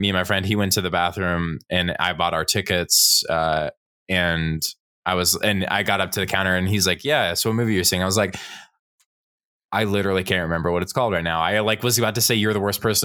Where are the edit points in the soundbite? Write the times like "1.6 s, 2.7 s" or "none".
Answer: none